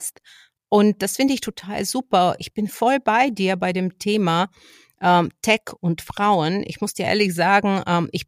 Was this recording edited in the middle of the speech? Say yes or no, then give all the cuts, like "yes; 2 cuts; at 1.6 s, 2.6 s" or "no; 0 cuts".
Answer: no; 0 cuts